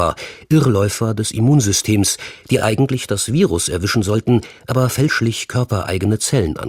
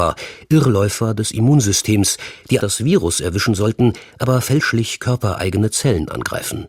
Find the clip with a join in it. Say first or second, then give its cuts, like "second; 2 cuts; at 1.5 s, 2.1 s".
second; 1 cut; at 2.6 s